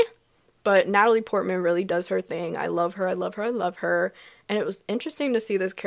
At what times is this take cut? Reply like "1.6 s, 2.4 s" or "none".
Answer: none